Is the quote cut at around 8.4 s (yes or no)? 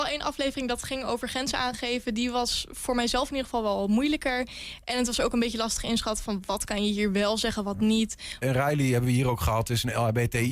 yes